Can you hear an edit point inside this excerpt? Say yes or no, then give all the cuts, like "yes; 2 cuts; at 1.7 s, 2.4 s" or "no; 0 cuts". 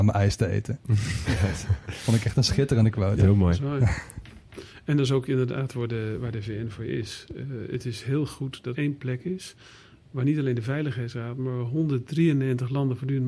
yes; 1 cut; at 8.7 s